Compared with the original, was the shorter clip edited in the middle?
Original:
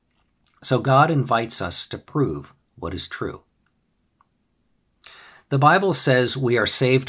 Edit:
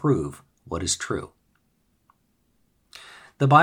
no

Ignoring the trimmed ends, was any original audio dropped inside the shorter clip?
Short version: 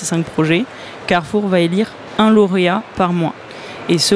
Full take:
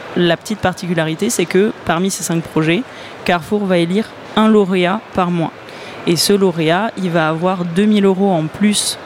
no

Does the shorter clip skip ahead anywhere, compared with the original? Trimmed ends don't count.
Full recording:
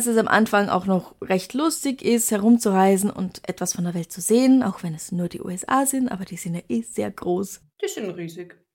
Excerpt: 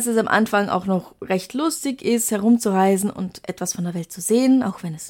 no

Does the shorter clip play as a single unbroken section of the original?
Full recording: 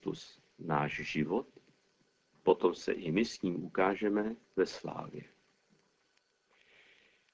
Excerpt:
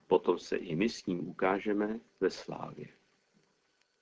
yes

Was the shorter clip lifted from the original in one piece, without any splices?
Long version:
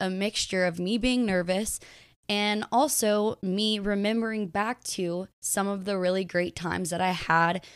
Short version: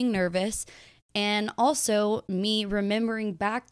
yes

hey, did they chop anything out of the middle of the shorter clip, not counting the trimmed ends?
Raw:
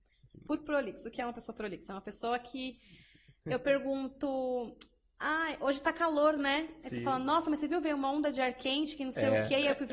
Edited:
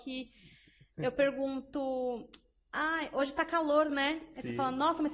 no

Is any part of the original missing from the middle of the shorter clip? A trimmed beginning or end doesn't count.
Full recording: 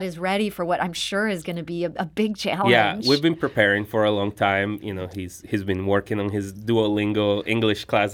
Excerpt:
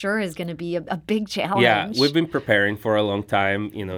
no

